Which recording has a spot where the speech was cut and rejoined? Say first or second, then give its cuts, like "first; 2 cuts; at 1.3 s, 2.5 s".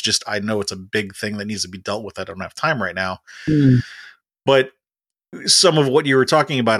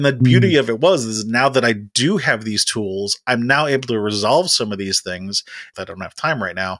second; 1 cut; at 5.7 s